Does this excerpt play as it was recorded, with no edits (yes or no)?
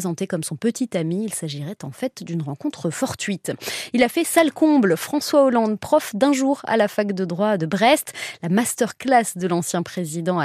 yes